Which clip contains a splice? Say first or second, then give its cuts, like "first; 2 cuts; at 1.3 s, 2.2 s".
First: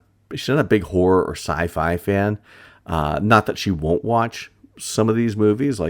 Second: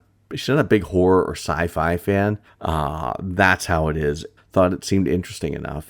second; 2 cuts; at 2.5 s, 4.4 s